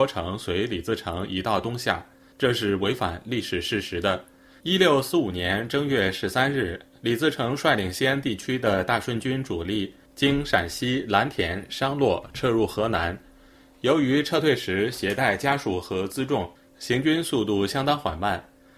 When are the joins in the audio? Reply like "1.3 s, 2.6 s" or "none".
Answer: 4.6 s